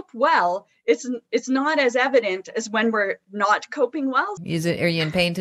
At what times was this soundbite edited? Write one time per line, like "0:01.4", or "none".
0:04.4